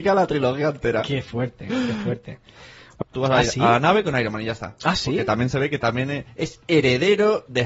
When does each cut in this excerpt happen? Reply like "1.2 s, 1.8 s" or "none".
3.1 s

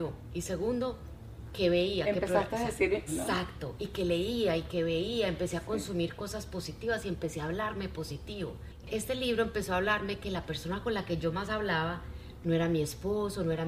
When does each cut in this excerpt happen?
3.1 s, 8.8 s

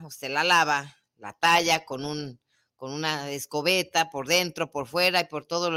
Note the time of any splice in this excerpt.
none

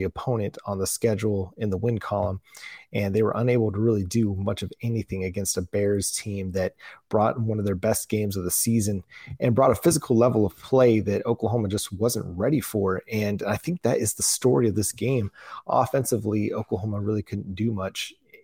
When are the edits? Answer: none

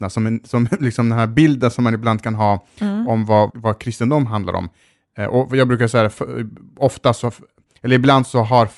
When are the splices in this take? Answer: 3.5 s

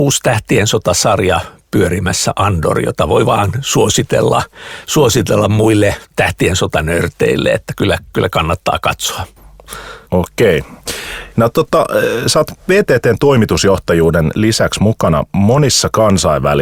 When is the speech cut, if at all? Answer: 10.1 s, 11.3 s

